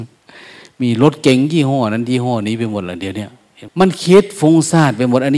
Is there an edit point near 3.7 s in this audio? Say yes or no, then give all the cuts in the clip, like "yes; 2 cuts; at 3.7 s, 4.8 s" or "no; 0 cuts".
yes; 1 cut; at 3.7 s